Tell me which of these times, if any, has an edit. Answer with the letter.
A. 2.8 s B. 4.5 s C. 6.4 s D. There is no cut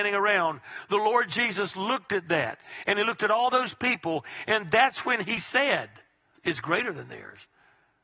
C